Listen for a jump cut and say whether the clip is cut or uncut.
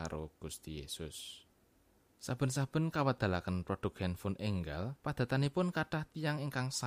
cut